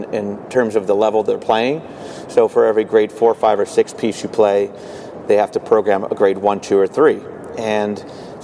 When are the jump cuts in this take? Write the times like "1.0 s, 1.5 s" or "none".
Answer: none